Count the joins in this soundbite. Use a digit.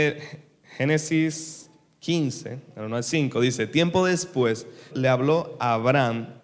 1